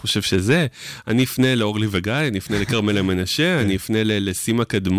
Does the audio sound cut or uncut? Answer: uncut